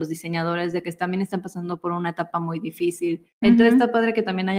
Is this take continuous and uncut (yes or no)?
no